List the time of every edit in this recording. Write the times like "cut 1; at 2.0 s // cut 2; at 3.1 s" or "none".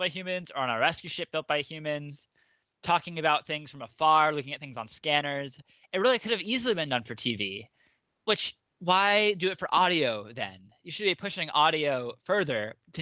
none